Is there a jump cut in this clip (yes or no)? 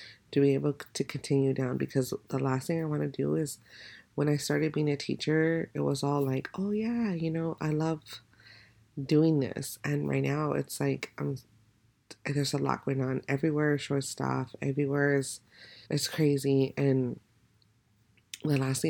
yes